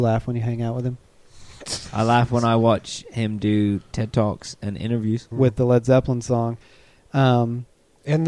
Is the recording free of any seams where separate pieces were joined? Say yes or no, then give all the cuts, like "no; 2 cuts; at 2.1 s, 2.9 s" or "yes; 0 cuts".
no; 1 cut; at 5.3 s